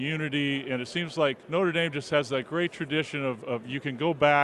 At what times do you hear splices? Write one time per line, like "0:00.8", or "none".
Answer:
0:01.4